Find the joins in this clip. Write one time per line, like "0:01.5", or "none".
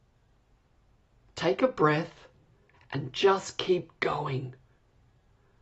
0:02.7